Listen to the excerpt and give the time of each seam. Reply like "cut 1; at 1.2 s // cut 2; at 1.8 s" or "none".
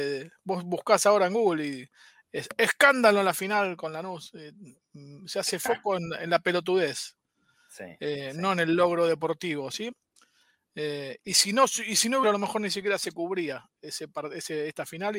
cut 1; at 11.2 s // cut 2; at 12.2 s